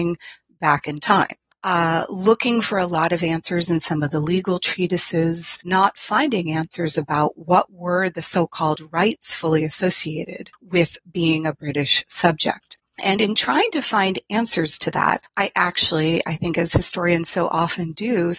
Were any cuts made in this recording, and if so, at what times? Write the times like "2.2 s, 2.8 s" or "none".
5.6 s, 12.8 s